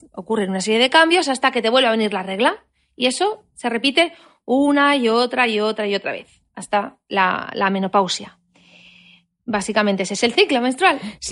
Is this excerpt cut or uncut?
uncut